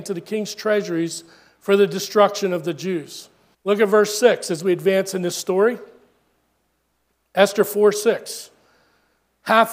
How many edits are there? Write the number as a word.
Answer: one